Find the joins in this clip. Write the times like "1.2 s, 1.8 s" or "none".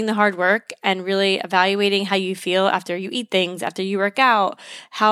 none